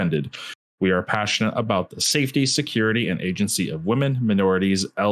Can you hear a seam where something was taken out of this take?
no; 0 cuts

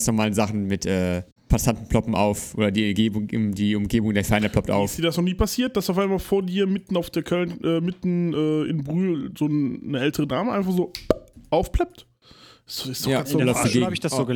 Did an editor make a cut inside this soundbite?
no; 0 cuts

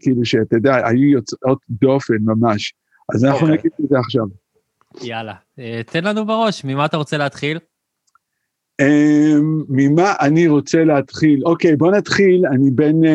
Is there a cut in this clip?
no; 0 cuts

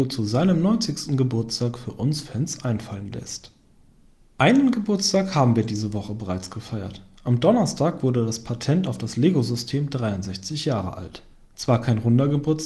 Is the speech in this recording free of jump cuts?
yes; 0 cuts

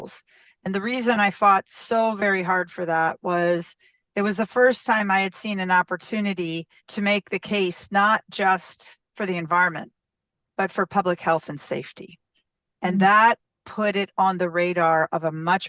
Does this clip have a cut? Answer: yes; 1 cut; at 6.8 s

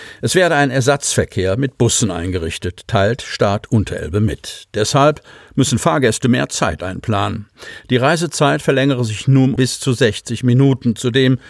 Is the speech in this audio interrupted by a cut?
yes; 1 cut; at 9.6 s

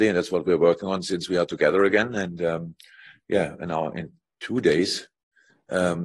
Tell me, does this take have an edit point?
no; 0 cuts

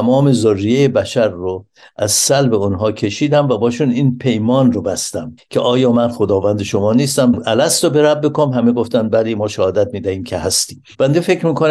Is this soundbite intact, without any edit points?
yes; 0 cuts

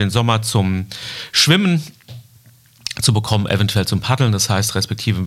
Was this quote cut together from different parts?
no; 0 cuts

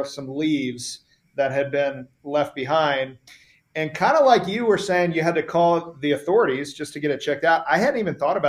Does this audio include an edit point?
no; 0 cuts

